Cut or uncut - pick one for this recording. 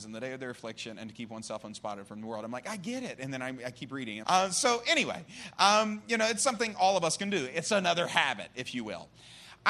cut